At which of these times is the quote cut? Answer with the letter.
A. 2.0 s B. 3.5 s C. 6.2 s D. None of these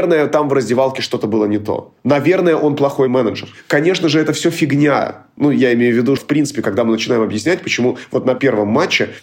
C